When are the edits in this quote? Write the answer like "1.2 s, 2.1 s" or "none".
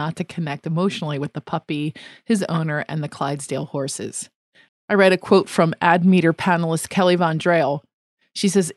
4.7 s